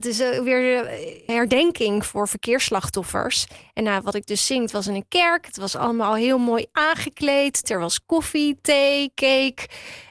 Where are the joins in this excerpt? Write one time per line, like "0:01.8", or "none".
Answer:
0:01.3
0:07.6